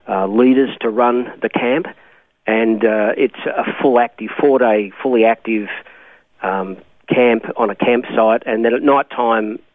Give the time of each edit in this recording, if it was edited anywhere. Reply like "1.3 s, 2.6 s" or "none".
none

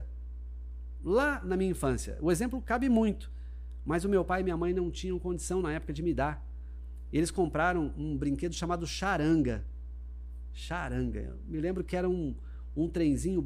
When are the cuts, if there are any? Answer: none

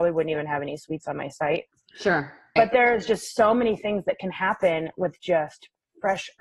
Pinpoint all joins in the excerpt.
2.6 s

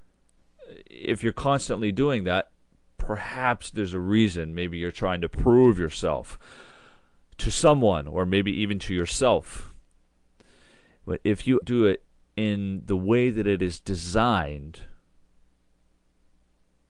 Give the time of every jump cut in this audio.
11.6 s

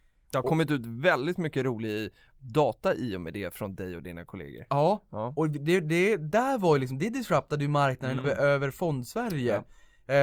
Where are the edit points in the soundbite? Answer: 8.2 s

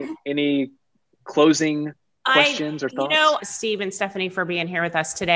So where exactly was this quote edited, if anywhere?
3.4 s

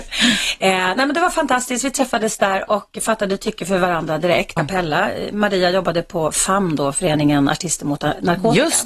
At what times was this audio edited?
4.6 s

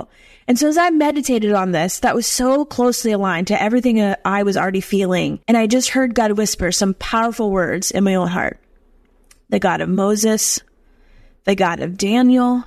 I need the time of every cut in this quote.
5.4 s

